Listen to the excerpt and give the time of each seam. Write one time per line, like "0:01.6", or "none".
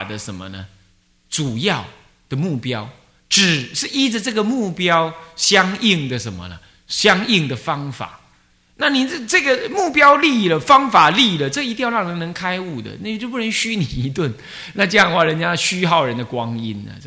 none